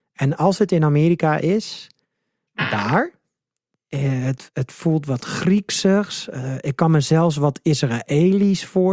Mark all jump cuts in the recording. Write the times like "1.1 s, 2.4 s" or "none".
2.5 s